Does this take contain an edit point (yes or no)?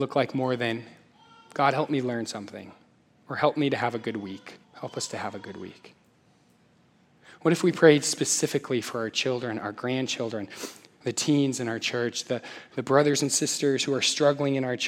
yes